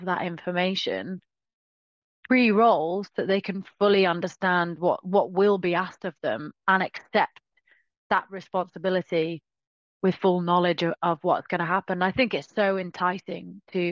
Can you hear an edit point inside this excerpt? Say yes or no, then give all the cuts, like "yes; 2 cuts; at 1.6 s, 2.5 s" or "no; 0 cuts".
no; 0 cuts